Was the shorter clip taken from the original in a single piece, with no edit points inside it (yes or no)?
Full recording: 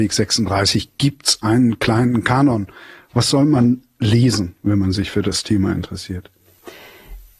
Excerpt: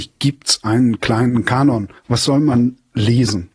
no